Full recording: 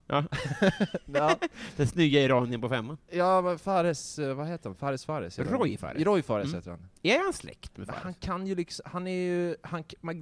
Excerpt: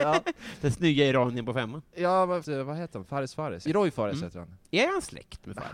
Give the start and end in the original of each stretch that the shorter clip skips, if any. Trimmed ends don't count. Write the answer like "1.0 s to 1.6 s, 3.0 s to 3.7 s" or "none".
3.6 s to 4.1 s, 5.4 s to 6.0 s

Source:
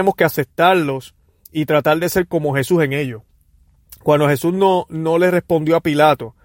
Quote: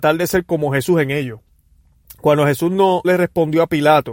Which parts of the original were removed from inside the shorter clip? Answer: 4.9 s to 5.2 s

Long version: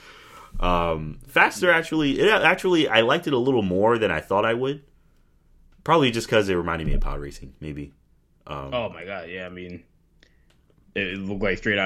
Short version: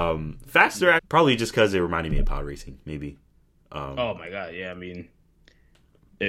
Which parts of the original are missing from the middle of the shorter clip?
1.8 s to 5.7 s

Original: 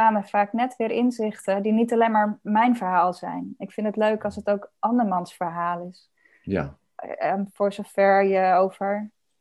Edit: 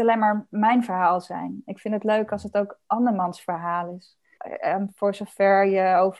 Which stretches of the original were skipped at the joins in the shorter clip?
6.3 s to 6.9 s

